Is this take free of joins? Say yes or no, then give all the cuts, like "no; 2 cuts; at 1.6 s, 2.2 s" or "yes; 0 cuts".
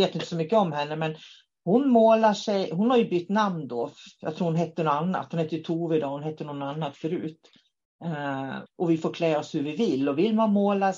no; 1 cut; at 8.7 s